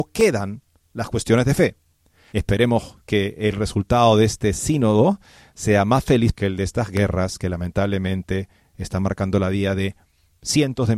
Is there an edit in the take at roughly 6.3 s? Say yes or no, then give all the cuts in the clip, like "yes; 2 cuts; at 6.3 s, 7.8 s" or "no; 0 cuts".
yes; 2 cuts; at 2.3 s, 6.3 s